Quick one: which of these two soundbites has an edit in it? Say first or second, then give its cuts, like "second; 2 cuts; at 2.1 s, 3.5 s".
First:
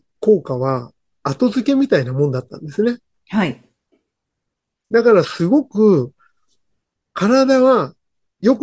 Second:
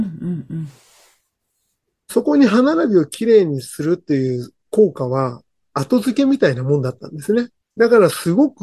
second; 1 cut; at 7.6 s